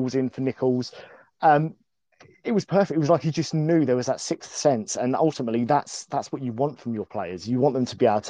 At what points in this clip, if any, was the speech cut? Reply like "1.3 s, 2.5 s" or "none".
none